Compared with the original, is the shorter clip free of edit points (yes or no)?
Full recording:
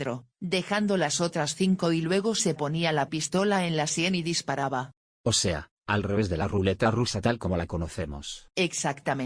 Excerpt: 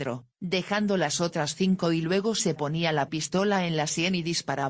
yes